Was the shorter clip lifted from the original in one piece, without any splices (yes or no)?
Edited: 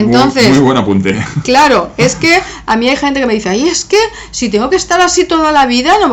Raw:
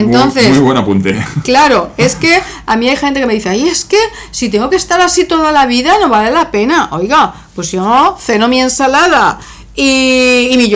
yes